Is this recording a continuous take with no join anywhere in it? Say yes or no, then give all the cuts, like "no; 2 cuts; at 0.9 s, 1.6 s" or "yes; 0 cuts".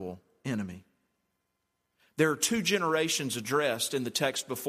yes; 0 cuts